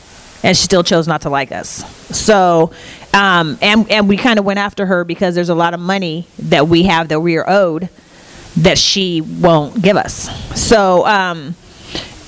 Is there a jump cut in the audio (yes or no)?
no